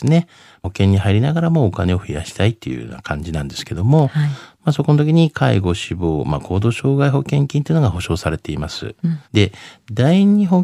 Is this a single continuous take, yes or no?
no